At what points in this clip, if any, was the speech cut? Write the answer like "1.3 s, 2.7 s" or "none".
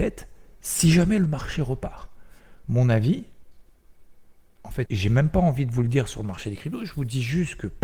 2.6 s, 4.9 s